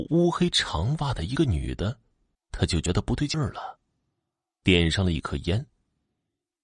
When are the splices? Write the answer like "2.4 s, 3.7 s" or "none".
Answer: 2.3 s